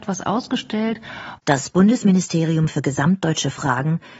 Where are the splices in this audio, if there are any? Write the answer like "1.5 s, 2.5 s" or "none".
1.4 s